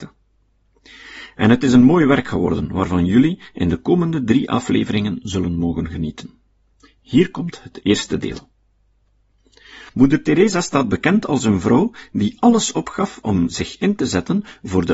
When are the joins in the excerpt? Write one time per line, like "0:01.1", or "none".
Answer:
0:09.9